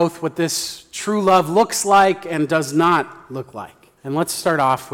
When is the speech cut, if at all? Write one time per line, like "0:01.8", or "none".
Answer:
0:04.0